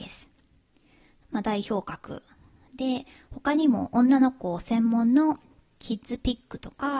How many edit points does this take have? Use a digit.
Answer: 1